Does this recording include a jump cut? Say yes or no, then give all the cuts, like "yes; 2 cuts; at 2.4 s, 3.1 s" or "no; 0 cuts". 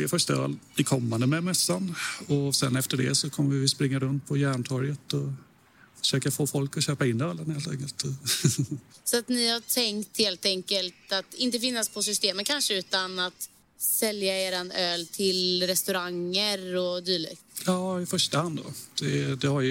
no; 0 cuts